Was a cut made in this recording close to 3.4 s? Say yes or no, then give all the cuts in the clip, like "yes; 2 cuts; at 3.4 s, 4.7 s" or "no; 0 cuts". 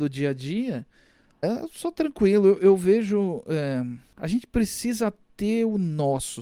no; 1 cut; at 1.4 s